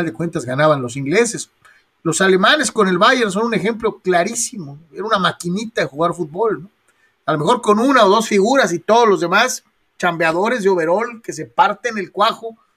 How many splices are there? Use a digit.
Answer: 0